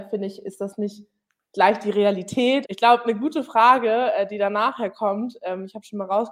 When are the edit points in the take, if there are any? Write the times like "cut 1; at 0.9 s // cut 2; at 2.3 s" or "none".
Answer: cut 1; at 2.6 s